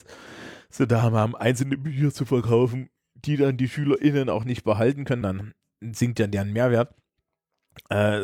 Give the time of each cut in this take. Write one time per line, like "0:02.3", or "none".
0:05.2